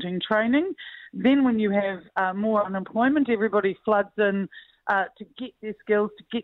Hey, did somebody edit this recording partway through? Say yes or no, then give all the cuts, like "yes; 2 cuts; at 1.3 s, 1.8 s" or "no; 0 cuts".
no; 0 cuts